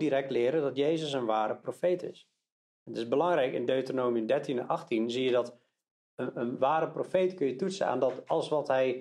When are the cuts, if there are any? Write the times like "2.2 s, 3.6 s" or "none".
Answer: none